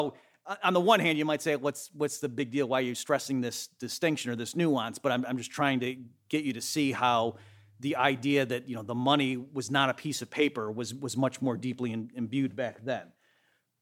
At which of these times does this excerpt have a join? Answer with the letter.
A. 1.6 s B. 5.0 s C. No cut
C